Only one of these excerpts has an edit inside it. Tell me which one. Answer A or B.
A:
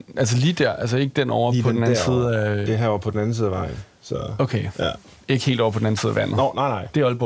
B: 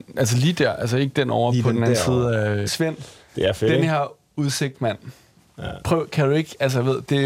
B